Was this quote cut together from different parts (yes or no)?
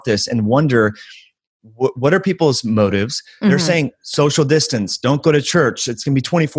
yes